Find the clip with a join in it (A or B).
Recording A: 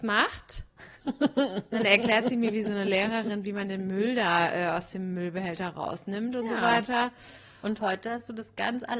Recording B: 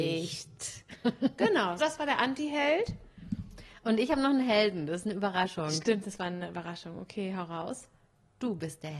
B